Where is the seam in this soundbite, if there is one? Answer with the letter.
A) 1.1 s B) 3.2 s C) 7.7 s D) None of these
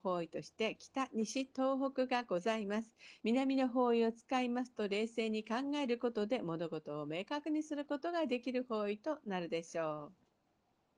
B